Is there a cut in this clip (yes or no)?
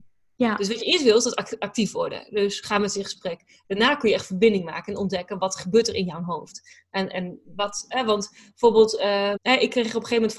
yes